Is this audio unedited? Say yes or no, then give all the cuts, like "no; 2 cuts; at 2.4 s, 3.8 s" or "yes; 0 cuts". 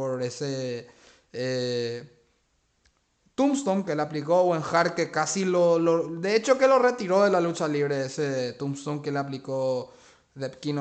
yes; 0 cuts